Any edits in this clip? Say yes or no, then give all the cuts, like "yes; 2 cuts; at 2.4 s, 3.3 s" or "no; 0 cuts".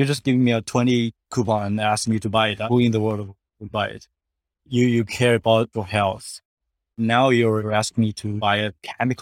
yes; 2 cuts; at 4.5 s, 6.9 s